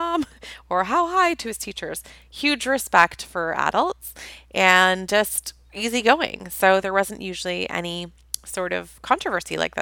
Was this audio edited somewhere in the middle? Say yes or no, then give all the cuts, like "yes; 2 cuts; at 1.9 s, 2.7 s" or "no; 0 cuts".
no; 0 cuts